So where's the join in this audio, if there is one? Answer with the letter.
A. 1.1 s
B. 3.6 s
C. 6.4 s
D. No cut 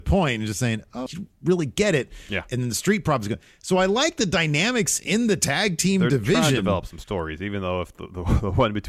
A